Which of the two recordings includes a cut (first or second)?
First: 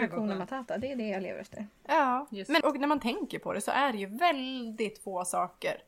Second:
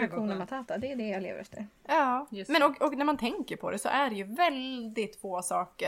first